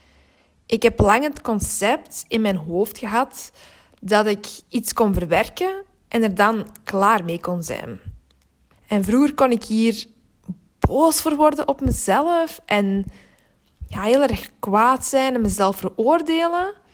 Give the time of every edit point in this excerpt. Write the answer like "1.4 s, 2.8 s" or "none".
8.7 s